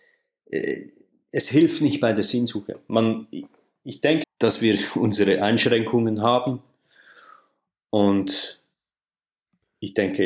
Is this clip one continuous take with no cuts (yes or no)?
no